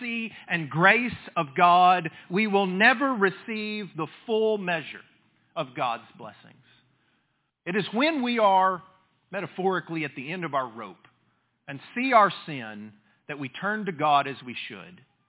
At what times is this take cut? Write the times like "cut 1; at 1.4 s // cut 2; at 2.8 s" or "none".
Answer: cut 1; at 7.5 s